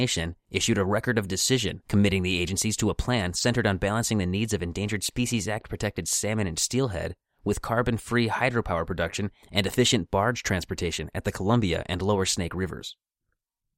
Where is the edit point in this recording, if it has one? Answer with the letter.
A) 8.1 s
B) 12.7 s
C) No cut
C